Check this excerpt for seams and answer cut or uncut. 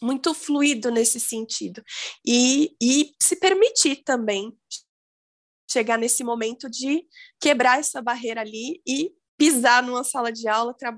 uncut